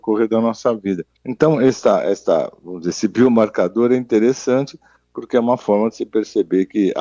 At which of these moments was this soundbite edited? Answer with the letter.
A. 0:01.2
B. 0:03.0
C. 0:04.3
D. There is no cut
A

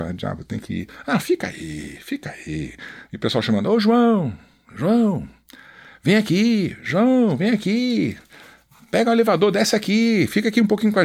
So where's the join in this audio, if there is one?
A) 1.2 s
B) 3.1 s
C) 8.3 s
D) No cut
B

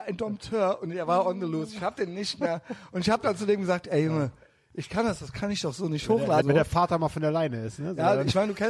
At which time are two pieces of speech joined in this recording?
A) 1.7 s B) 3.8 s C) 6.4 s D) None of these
C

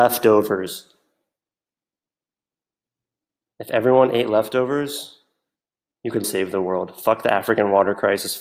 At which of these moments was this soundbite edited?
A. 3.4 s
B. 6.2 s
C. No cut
B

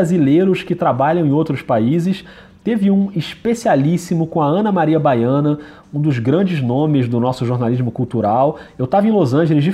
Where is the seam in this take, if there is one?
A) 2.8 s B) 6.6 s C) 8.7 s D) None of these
D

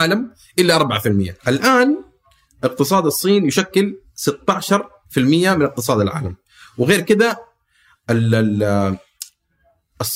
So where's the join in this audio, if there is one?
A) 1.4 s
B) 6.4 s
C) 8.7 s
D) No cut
A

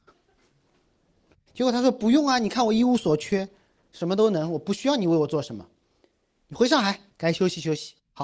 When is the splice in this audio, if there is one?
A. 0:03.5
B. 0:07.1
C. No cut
B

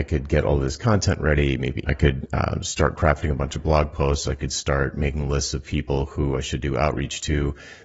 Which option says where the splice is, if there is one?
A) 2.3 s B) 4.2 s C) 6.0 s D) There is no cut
D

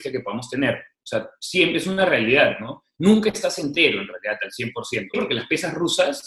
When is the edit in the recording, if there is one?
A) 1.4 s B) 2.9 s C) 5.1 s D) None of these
C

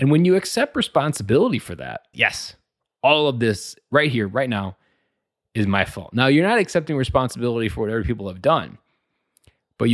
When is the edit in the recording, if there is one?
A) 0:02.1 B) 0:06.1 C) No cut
A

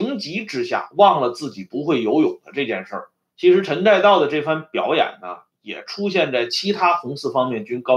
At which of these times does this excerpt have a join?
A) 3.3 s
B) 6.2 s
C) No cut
A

